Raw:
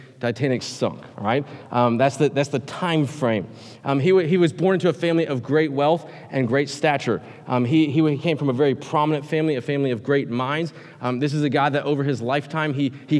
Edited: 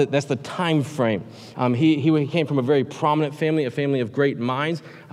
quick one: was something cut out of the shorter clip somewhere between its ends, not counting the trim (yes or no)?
yes